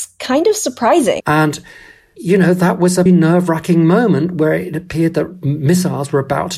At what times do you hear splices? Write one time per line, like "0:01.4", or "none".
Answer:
0:01.2
0:03.1